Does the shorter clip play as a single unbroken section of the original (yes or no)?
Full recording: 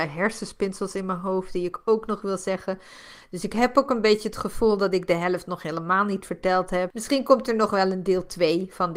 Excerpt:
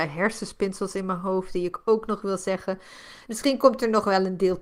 no